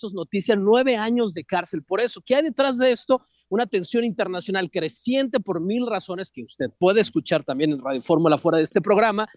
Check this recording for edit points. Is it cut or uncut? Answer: uncut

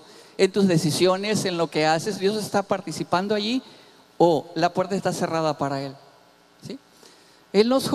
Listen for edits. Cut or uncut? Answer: uncut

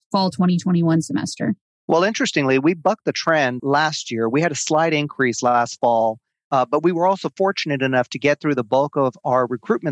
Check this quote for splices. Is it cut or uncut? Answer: cut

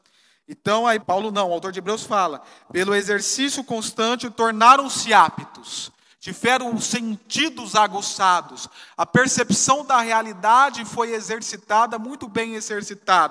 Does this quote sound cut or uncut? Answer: cut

